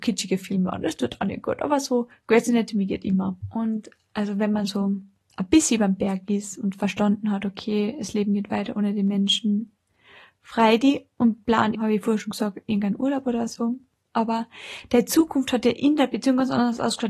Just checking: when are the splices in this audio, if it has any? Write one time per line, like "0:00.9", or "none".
0:03.4
0:11.7